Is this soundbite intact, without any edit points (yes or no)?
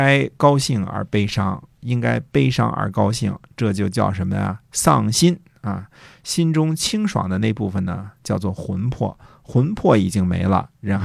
yes